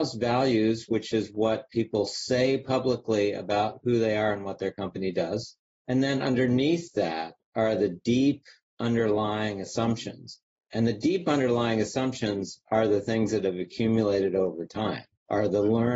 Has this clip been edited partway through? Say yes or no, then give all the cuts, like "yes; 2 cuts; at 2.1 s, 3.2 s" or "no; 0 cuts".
no; 0 cuts